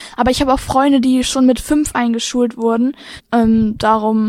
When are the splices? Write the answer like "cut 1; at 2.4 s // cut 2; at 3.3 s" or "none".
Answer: cut 1; at 3.2 s